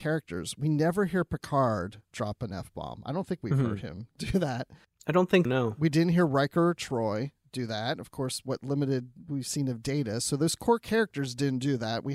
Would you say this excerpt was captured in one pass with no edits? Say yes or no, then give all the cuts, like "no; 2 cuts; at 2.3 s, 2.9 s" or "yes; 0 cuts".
no; 1 cut; at 5.4 s